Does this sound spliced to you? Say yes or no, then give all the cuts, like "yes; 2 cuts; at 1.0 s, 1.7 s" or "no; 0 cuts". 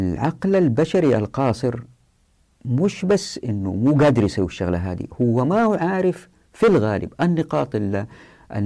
no; 0 cuts